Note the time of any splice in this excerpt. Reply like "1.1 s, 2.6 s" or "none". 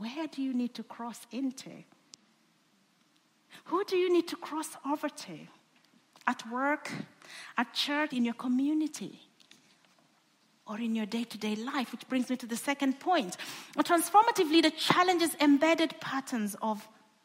8.1 s